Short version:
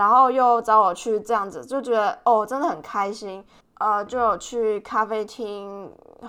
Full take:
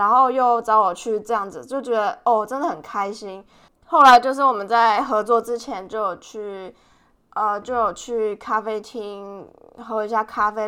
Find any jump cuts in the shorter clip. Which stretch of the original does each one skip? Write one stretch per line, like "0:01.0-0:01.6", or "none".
0:03.6-0:07.2